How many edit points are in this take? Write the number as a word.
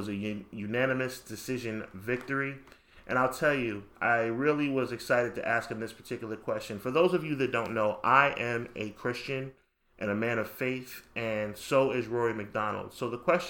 one